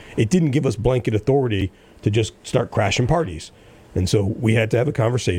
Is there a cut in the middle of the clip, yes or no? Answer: no